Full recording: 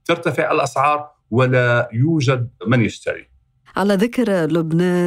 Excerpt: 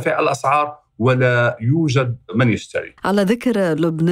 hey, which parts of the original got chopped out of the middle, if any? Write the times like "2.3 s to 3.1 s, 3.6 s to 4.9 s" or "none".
3.3 s to 3.7 s